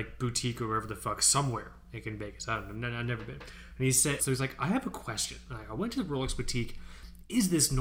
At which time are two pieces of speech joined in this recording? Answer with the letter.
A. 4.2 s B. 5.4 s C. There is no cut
A